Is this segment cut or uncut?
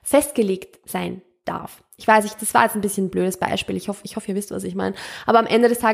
uncut